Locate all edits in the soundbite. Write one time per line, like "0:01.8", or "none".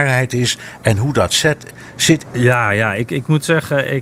0:02.2